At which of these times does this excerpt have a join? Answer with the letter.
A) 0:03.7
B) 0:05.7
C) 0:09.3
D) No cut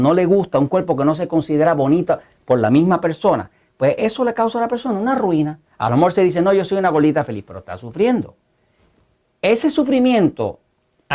B